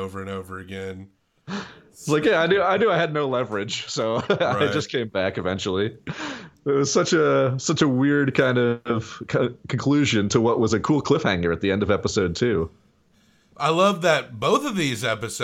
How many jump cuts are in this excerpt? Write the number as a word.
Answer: zero